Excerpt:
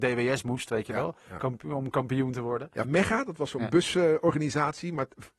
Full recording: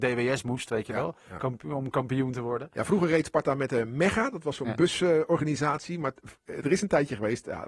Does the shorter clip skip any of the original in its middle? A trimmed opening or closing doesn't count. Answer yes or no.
yes